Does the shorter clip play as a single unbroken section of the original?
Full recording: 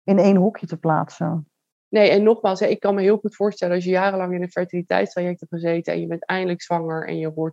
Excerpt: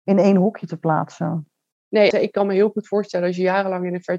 no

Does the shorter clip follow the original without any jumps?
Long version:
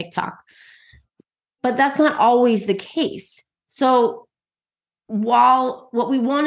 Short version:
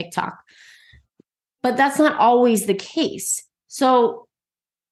yes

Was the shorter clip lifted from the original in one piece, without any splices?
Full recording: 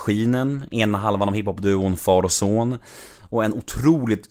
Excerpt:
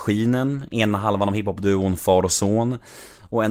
yes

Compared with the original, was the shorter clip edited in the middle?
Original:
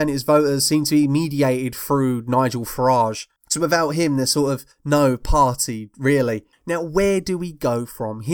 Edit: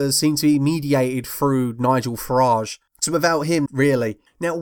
yes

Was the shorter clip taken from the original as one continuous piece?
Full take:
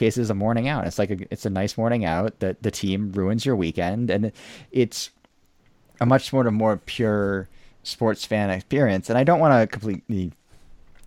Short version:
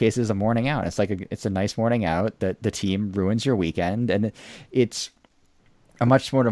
yes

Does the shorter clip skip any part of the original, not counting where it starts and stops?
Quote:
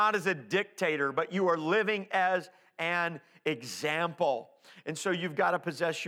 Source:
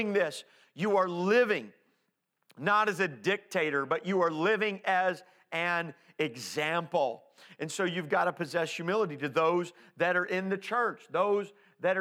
no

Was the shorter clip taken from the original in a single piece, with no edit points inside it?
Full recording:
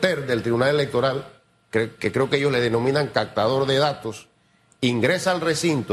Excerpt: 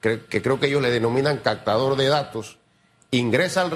yes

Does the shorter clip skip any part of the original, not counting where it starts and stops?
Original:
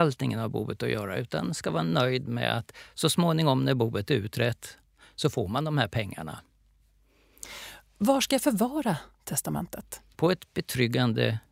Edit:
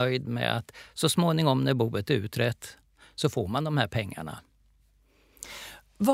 no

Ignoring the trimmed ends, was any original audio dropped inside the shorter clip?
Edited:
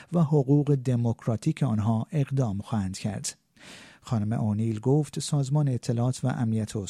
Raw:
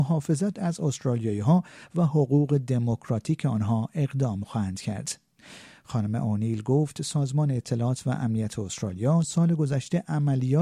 no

